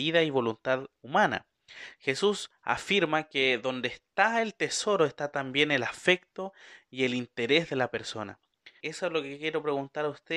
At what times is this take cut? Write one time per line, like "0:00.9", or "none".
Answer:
0:08.8